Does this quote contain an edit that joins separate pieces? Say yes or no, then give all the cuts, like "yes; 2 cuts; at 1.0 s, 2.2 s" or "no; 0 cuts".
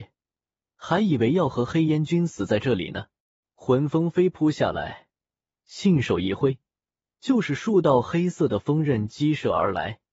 yes; 1 cut; at 3.4 s